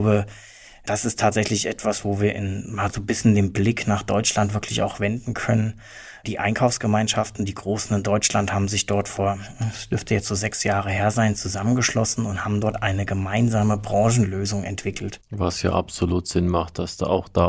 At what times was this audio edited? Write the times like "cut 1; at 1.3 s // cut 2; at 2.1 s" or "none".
none